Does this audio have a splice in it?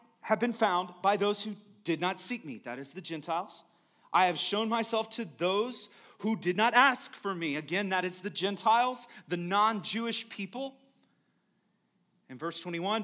no; 0 cuts

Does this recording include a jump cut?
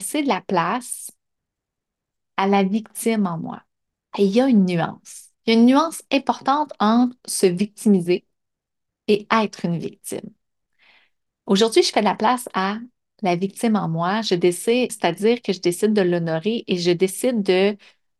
yes; 2 cuts; at 4.0 s, 14.9 s

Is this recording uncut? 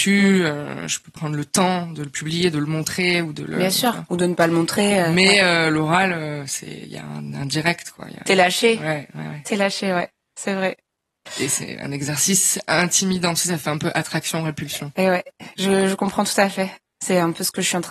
yes; 0 cuts

